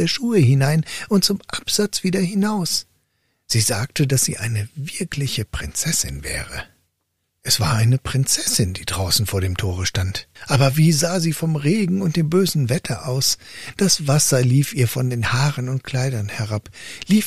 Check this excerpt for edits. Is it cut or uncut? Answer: cut